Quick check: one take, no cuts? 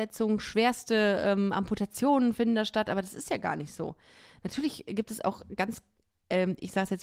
yes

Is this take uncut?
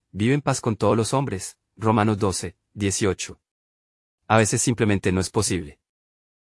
yes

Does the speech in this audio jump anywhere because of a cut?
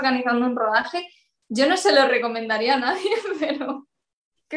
no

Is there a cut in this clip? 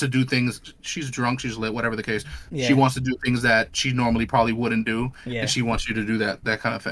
no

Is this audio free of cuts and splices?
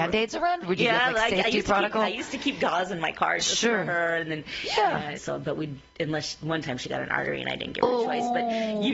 no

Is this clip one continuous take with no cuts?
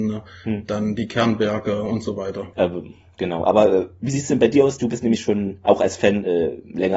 no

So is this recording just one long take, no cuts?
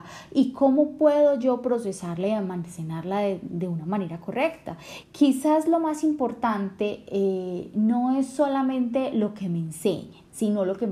no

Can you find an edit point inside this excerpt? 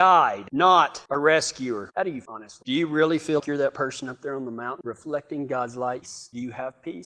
yes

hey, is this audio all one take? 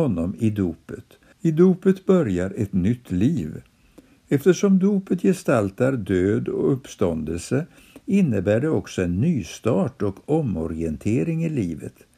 no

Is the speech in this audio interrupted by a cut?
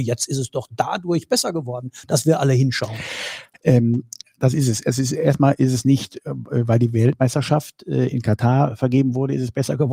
no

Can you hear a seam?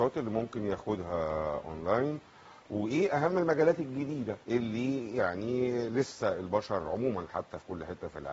yes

